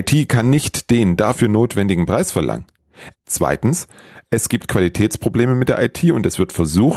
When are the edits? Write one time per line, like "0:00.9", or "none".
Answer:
0:03.1